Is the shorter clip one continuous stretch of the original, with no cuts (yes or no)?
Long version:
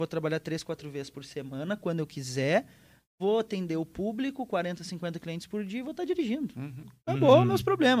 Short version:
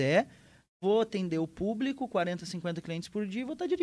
yes